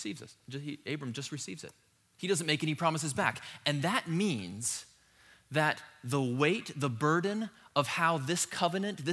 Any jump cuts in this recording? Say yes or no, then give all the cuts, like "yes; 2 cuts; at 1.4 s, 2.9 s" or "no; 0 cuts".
no; 0 cuts